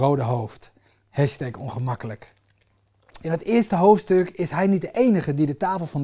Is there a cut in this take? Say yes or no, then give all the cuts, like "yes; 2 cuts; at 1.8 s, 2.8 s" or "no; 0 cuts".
yes; 1 cut; at 3.2 s